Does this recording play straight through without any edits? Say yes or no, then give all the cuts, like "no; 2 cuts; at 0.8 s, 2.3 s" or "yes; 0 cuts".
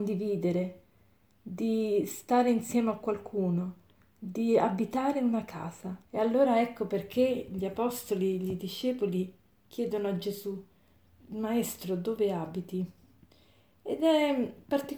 no; 2 cuts; at 6.0 s, 11.1 s